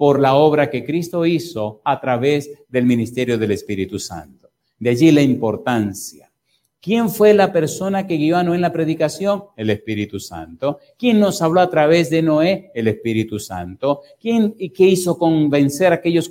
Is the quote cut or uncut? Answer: uncut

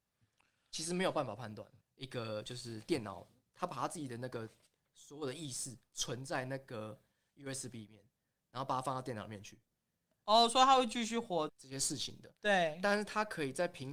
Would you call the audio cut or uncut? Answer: cut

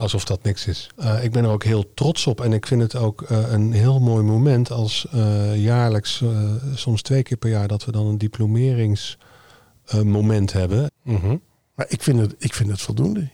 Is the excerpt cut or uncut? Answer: cut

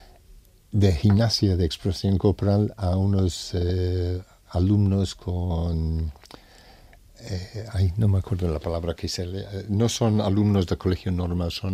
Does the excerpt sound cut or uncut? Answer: uncut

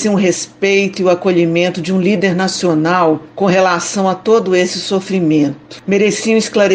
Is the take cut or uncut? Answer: uncut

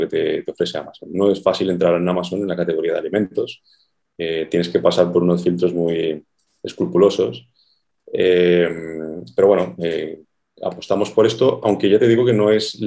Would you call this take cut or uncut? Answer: uncut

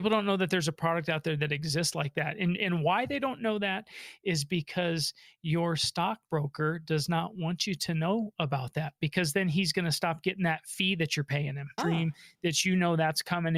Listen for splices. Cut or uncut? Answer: cut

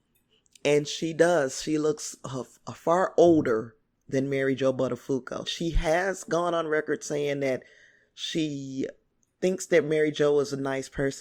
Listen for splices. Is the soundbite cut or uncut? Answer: cut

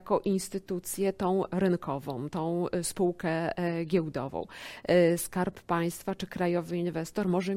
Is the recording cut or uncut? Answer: uncut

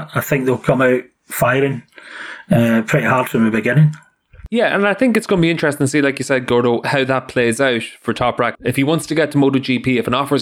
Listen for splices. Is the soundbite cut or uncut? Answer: cut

